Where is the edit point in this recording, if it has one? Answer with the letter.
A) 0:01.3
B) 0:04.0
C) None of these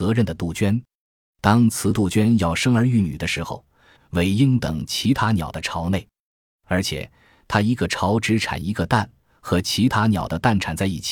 B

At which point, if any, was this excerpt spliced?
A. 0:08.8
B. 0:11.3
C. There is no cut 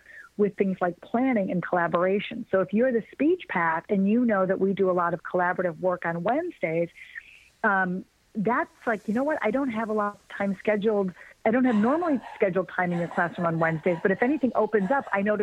B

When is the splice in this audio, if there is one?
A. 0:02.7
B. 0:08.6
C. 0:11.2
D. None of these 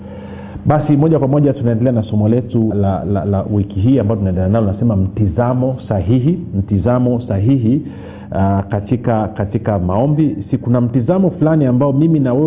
A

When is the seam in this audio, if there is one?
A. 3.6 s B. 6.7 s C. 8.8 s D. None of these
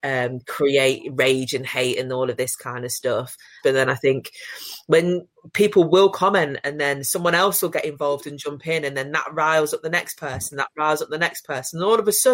A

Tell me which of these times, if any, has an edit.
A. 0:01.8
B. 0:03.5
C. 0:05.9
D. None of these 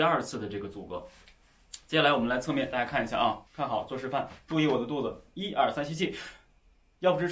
B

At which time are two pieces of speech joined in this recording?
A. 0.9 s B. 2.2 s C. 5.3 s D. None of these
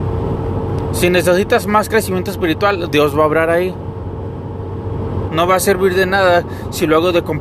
C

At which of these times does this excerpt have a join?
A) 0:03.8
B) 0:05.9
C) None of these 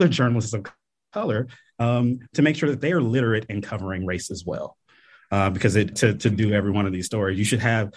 B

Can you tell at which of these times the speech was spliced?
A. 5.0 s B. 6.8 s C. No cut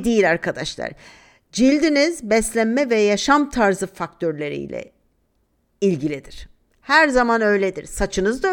C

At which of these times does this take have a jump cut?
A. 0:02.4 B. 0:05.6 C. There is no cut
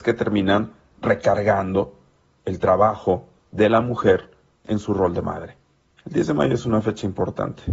C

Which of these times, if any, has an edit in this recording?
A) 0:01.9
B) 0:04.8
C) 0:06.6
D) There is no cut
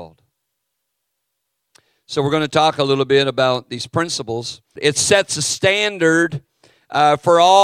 B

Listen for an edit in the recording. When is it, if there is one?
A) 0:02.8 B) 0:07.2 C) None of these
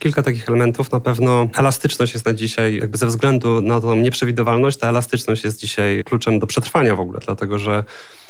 C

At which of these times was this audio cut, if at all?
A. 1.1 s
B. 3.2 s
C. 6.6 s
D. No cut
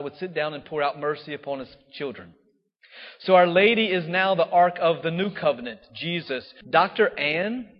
C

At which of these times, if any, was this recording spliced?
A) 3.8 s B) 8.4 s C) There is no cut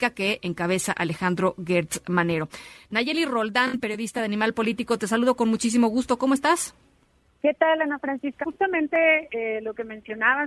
B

